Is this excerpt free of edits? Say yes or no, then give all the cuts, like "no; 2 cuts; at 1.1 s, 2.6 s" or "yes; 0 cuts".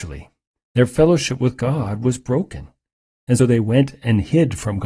no; 1 cut; at 3.4 s